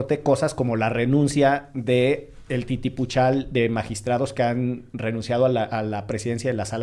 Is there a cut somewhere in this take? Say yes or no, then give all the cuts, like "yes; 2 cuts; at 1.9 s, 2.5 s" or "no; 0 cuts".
no; 0 cuts